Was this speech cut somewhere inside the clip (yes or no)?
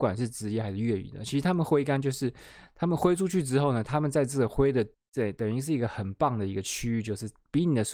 yes